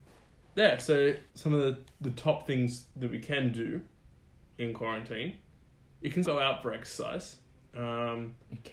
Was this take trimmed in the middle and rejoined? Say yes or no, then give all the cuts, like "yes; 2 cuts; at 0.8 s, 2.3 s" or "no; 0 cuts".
yes; 2 cuts; at 1.3 s, 6.2 s